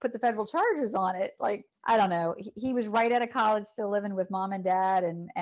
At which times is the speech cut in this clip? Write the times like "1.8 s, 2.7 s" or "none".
1.7 s